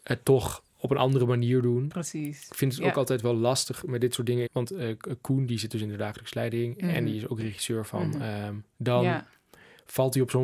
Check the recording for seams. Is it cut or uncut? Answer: cut